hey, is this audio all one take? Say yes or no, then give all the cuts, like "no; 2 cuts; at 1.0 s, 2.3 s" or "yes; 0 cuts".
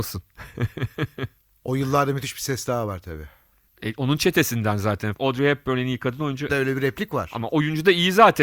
no; 2 cuts; at 5.1 s, 6.5 s